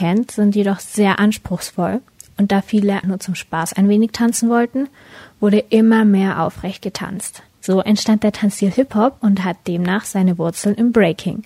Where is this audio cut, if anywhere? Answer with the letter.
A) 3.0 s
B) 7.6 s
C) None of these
A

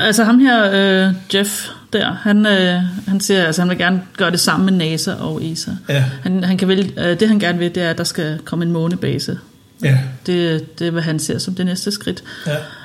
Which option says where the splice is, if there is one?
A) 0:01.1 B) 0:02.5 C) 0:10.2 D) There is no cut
D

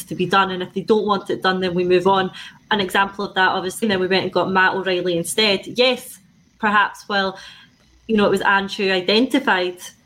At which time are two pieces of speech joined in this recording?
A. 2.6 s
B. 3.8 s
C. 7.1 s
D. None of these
B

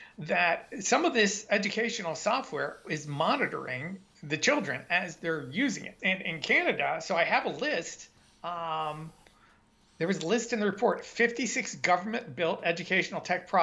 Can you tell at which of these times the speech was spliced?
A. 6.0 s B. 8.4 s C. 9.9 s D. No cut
A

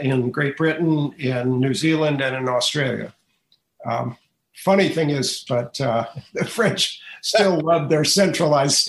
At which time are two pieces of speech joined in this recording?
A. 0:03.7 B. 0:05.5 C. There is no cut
B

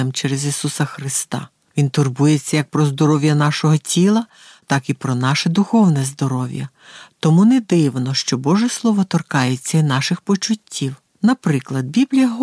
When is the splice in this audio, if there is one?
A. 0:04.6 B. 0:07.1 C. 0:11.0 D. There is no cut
D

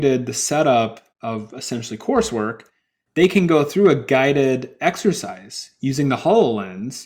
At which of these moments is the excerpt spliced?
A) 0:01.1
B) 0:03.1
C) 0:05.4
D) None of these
A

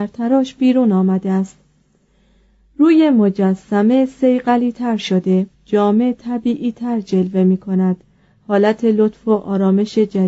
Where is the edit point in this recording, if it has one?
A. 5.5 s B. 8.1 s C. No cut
A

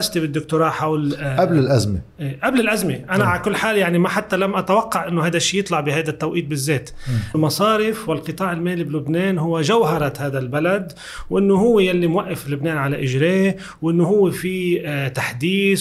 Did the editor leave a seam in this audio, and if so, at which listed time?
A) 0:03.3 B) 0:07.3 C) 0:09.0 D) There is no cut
B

